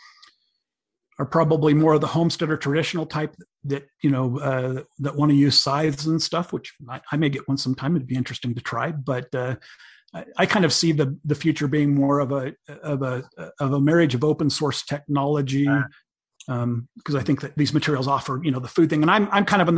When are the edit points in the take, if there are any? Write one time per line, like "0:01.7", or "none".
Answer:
0:16.4